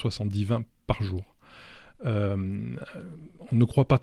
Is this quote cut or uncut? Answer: uncut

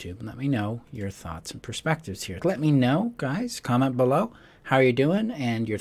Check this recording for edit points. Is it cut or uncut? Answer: cut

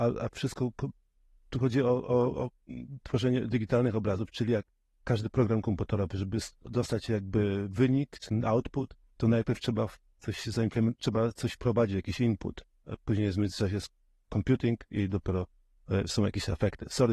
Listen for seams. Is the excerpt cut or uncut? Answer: uncut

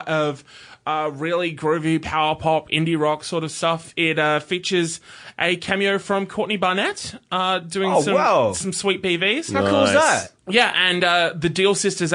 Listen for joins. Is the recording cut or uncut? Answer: uncut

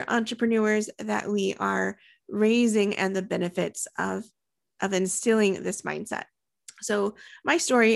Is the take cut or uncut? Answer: uncut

